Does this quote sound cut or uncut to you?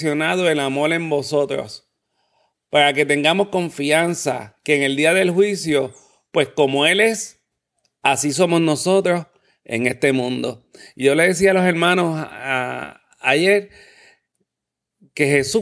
uncut